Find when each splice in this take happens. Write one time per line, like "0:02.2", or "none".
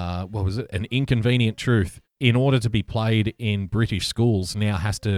0:02.2